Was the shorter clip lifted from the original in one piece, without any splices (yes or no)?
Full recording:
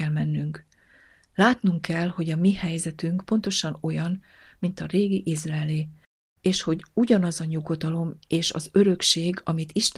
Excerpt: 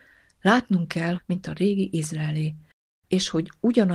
no